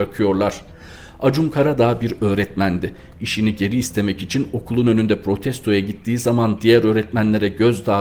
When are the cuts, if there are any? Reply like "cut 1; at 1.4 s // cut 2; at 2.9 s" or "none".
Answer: cut 1; at 3.1 s